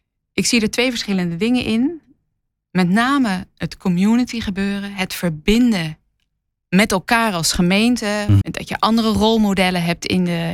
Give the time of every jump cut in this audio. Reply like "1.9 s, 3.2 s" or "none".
8.4 s